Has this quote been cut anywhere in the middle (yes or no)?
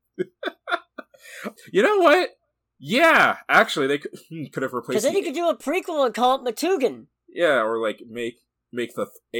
no